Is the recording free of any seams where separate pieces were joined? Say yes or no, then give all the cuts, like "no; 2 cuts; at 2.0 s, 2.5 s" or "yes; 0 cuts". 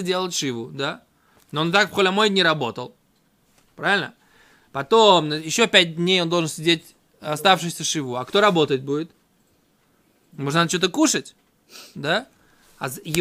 yes; 0 cuts